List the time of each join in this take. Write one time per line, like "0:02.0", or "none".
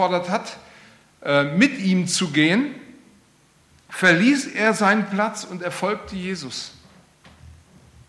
none